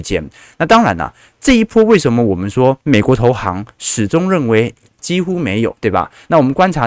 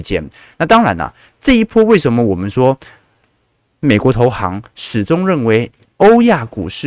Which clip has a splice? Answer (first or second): first